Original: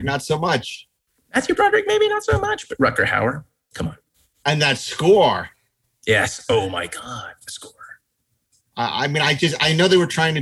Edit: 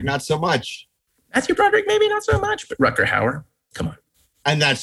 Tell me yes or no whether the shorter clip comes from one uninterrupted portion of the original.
yes